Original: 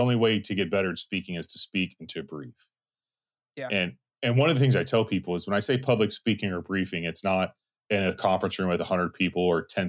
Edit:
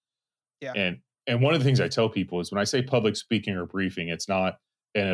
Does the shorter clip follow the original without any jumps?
yes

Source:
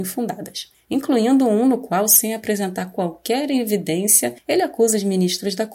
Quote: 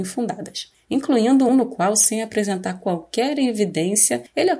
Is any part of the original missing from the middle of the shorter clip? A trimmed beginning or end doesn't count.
yes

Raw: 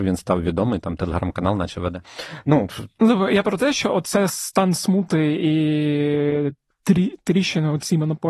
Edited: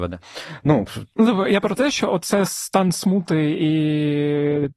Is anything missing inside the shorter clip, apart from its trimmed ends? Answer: no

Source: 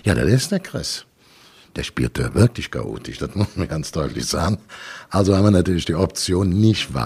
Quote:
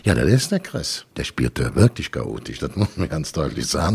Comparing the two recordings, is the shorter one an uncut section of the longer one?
no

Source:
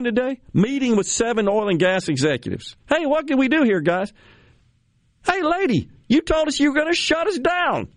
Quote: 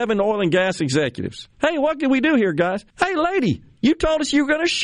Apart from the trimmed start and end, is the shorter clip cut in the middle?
yes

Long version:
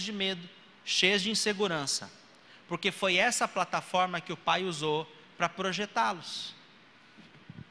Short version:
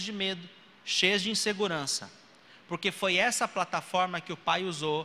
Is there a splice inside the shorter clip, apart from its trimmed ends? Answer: no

